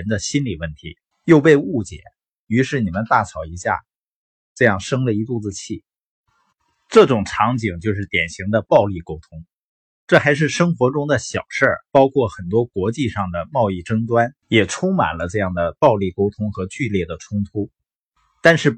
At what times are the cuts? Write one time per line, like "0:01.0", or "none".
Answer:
0:01.1
0:11.9
0:14.4